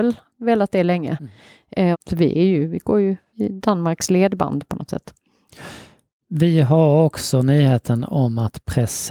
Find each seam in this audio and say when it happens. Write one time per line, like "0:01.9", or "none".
0:01.9